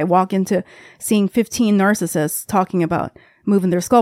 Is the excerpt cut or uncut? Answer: uncut